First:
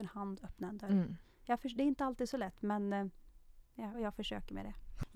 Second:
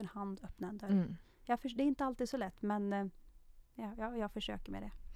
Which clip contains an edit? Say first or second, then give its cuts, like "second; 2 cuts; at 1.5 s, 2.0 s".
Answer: first; 1 cut; at 3.9 s